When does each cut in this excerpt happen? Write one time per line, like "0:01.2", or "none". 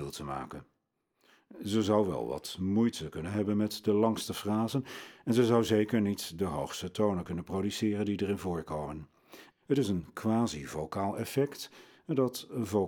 0:09.5

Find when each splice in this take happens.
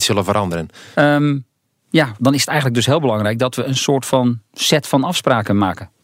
0:00.9

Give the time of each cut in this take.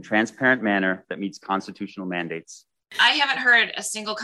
0:02.9

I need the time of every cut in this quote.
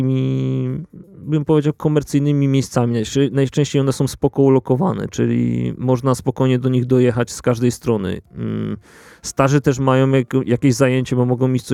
none

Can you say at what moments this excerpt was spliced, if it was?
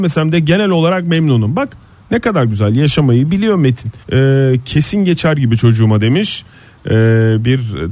0:04.0

